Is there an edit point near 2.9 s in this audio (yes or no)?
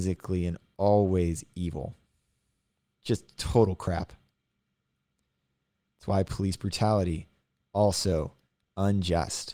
yes